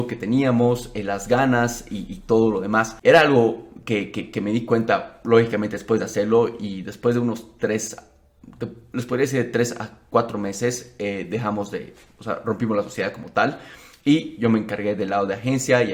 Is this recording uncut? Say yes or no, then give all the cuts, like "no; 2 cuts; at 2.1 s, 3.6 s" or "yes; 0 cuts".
no; 1 cut; at 3.0 s